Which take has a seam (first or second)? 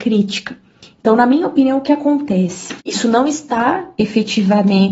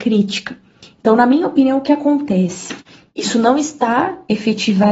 first